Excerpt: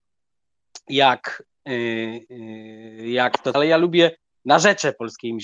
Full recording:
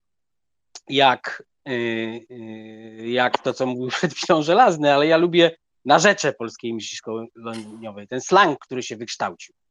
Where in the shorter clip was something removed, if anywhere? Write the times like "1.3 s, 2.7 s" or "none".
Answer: 3.5 s